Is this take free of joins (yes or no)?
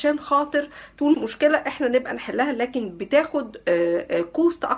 no